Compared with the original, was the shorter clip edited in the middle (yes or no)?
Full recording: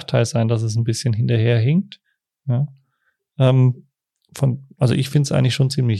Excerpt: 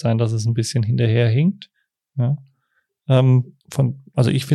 yes